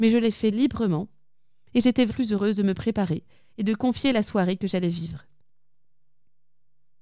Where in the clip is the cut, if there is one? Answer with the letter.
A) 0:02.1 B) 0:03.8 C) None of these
A